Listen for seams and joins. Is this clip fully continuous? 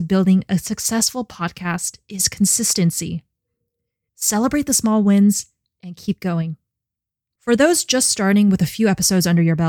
no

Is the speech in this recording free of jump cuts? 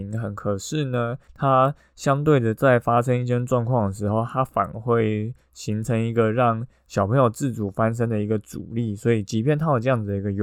yes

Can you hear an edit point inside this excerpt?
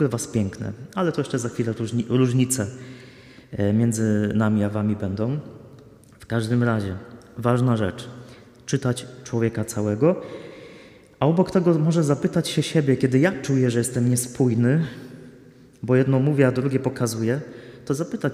no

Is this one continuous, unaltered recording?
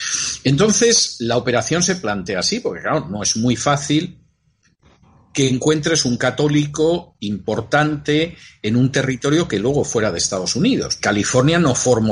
no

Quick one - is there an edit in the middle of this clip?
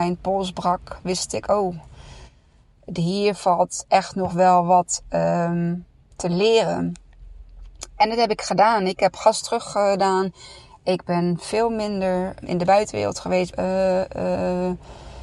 yes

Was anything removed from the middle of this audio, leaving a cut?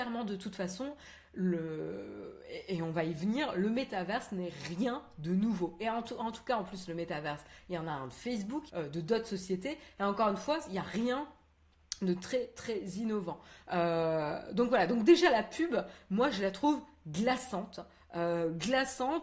yes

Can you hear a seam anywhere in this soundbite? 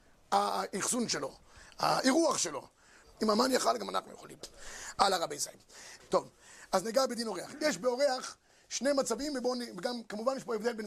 yes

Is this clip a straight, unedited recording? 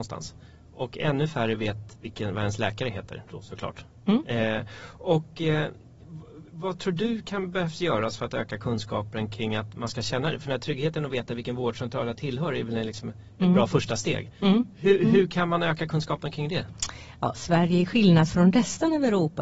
yes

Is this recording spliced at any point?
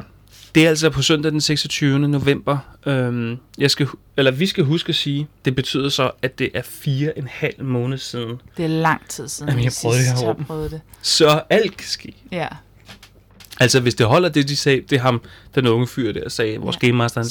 no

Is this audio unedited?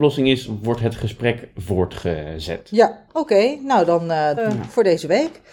no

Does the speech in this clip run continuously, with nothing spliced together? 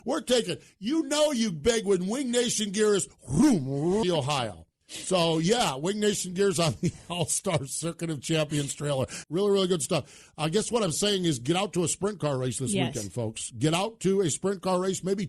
no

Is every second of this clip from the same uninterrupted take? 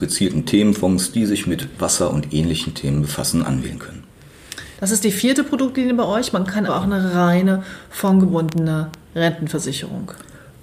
no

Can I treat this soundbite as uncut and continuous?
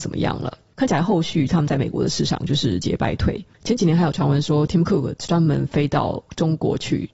no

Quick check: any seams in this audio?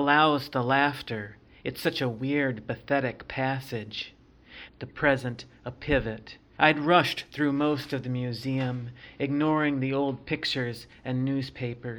yes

